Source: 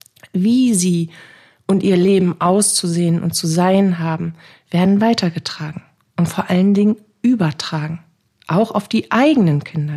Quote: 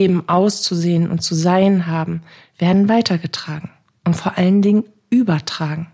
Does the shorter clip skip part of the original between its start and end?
no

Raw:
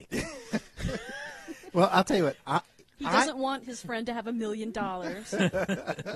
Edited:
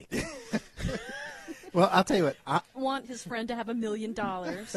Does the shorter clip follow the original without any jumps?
no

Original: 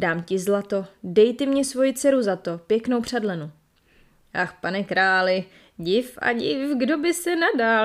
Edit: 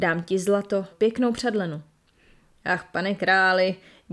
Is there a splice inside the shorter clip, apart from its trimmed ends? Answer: yes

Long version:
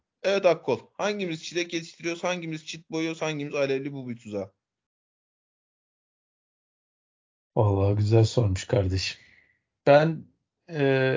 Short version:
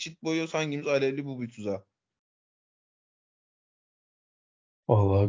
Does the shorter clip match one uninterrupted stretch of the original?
yes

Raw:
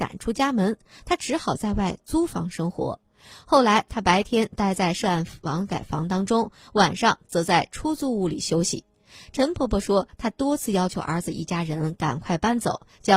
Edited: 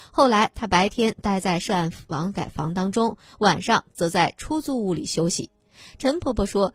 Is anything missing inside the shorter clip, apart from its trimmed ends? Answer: no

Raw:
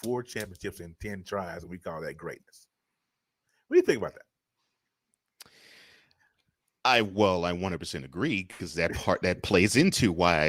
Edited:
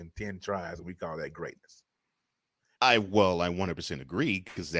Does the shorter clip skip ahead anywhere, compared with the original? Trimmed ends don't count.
yes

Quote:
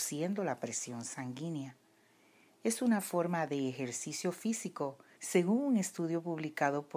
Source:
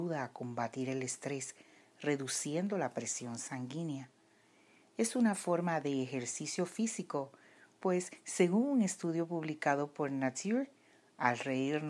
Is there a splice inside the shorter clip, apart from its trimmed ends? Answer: yes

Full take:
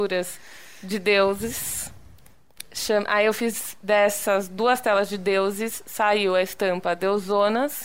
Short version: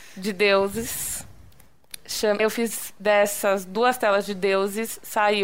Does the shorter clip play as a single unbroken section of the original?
no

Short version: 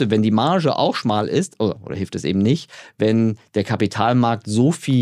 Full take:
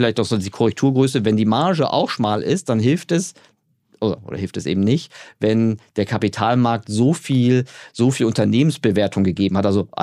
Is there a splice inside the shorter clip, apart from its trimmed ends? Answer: yes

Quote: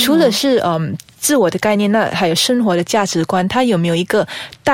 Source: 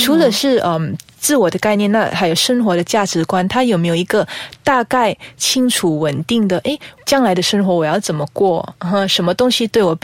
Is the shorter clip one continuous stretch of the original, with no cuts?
yes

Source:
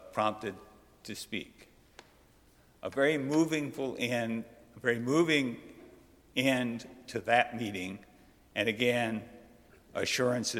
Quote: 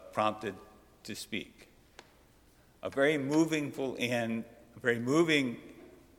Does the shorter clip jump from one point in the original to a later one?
no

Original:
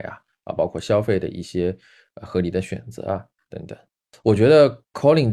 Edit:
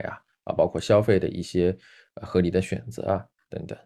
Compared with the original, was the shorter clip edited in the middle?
no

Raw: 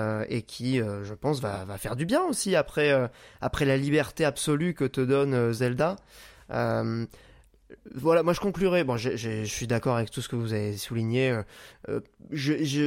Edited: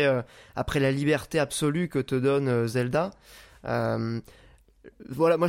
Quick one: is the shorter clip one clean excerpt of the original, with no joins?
yes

